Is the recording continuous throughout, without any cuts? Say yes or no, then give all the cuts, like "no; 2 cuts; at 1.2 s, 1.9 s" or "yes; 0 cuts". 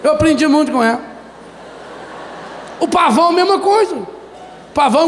yes; 0 cuts